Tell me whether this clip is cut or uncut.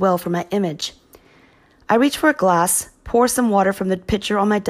uncut